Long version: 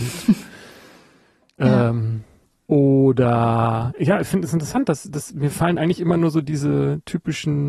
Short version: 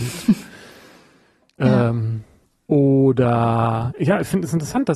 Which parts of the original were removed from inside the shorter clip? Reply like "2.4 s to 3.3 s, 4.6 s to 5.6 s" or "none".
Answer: none